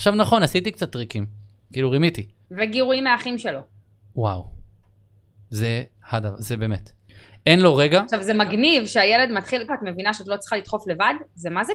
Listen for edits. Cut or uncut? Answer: cut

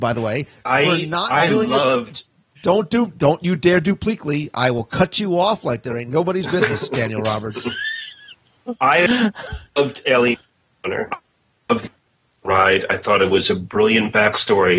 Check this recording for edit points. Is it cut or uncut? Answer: uncut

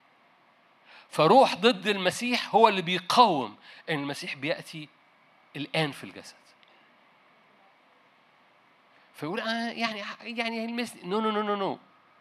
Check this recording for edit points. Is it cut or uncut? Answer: uncut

